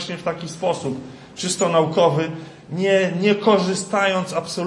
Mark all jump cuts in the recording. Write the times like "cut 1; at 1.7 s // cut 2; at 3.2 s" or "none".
none